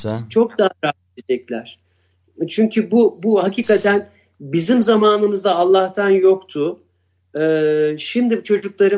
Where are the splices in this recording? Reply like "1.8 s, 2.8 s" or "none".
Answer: none